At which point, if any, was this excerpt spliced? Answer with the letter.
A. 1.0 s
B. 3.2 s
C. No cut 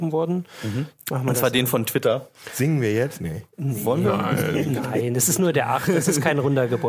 A